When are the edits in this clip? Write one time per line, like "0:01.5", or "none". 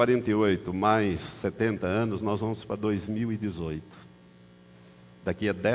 none